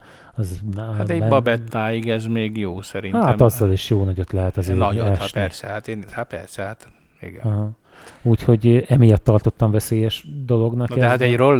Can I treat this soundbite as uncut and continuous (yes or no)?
no